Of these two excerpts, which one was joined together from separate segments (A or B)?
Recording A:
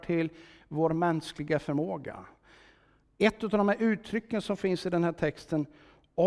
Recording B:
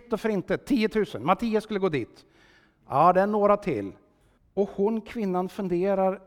B